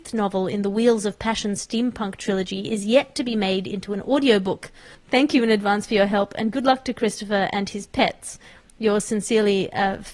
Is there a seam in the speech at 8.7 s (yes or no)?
no